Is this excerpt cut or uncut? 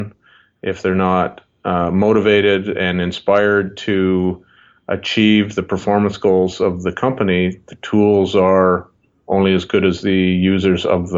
uncut